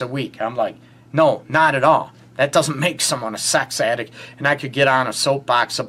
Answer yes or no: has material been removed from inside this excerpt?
no